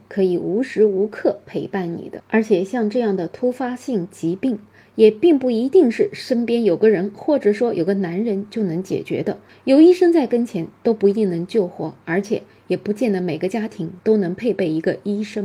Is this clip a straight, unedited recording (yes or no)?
yes